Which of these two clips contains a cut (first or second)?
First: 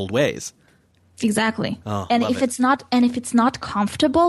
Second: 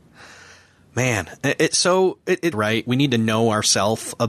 second